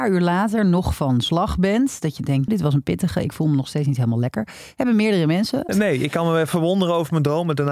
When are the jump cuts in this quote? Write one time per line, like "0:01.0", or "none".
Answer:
0:02.5
0:05.7